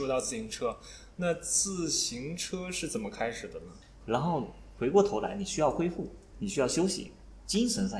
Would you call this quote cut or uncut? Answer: cut